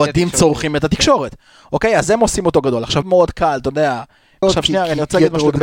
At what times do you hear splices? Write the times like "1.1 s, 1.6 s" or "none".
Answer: 3.0 s, 4.4 s